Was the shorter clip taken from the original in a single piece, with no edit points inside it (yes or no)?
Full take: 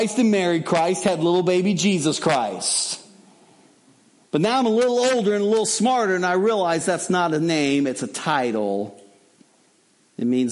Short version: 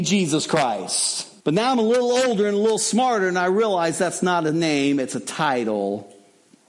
no